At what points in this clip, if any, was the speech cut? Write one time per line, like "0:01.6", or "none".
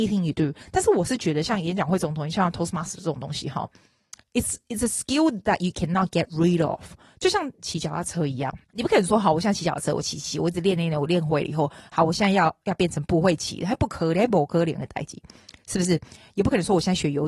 0:08.6